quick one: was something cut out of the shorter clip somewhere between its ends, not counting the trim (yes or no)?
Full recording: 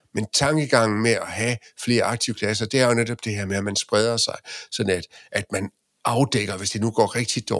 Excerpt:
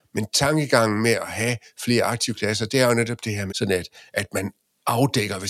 yes